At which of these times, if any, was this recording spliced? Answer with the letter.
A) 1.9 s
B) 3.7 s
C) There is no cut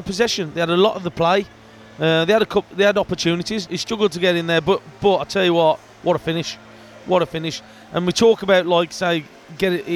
B